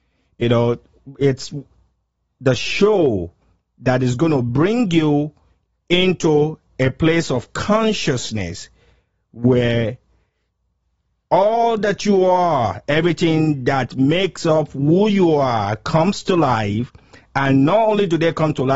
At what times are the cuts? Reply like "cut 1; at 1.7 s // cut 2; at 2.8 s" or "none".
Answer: none